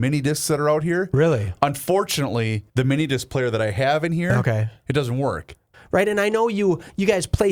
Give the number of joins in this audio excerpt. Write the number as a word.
two